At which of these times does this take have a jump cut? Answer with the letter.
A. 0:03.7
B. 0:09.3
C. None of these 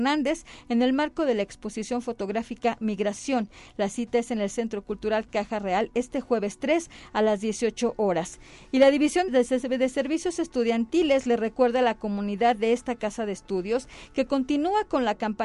B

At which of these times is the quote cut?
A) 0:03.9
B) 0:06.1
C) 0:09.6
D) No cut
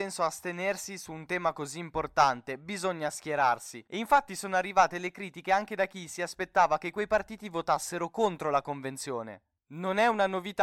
A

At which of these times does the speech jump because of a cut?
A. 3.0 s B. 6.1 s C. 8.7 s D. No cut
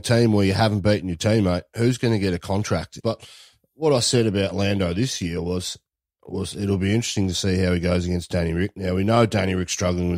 A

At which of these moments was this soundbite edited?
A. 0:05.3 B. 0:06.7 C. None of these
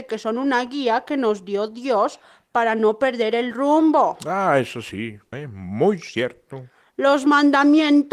A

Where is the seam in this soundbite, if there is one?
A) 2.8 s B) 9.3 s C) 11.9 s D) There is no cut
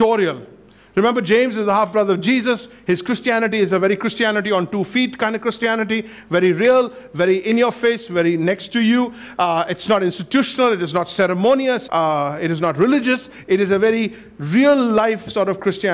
C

